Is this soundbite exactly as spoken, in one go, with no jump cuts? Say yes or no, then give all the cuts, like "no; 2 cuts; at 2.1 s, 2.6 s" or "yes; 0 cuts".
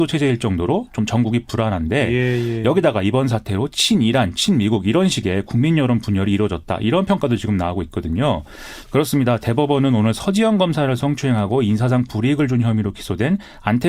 no; 1 cut; at 8.8 s